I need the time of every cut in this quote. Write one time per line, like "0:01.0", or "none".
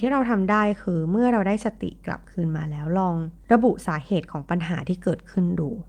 0:03.4